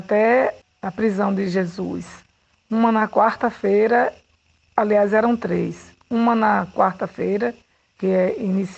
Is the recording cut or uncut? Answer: cut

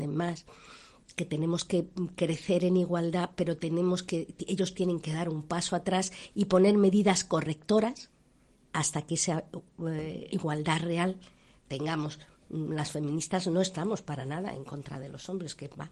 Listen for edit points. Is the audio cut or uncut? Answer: cut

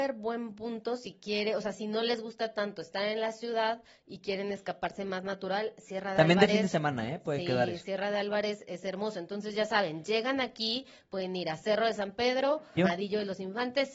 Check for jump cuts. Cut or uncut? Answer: cut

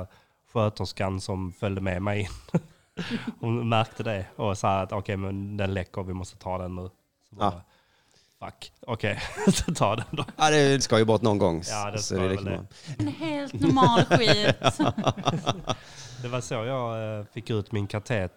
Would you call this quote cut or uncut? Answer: cut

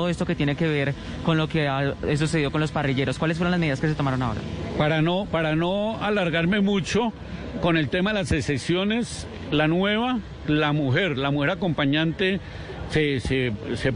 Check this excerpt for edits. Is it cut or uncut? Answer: uncut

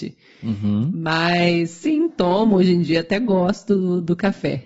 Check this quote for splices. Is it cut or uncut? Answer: uncut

